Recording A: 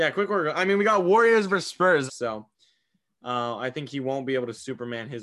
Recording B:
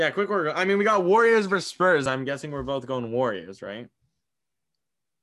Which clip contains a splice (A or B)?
A